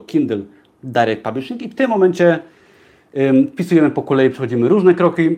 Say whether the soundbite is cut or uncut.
uncut